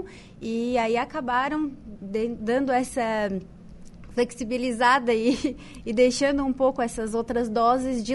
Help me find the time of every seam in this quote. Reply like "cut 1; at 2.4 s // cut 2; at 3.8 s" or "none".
none